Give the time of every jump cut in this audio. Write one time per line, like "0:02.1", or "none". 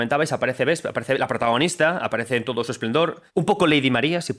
0:03.3

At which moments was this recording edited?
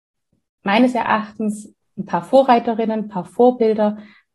none

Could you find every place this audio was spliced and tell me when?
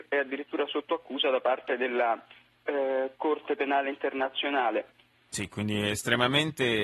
0:05.1

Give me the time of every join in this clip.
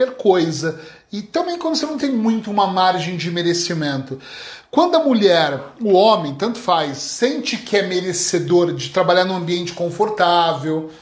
none

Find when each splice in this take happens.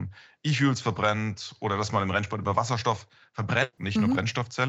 0:03.8

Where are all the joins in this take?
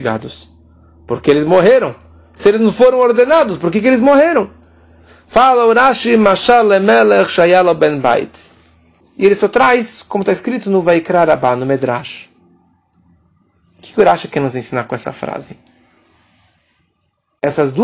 0:09.0

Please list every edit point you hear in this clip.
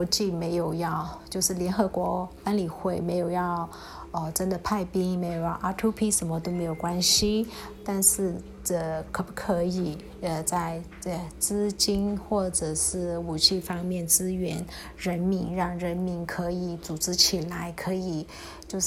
none

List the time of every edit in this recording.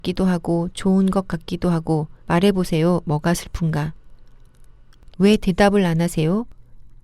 0:02.2
0:05.1

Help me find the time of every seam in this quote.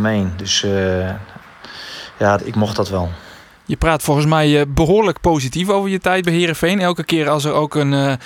0:02.4

